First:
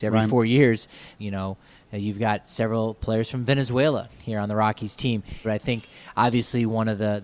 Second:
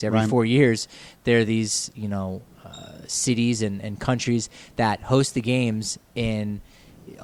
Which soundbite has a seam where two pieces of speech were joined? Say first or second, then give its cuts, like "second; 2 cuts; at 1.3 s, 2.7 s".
first; 2 cuts; at 1.2 s, 5.4 s